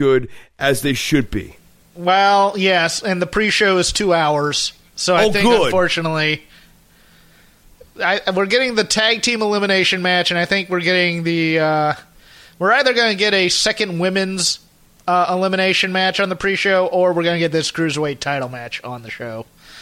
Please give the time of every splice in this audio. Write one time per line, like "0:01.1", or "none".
none